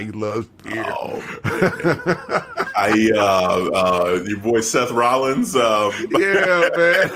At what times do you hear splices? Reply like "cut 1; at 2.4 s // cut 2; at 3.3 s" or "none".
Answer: none